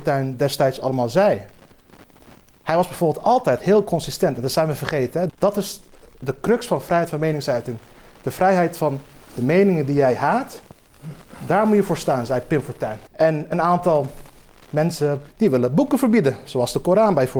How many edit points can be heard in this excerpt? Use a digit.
3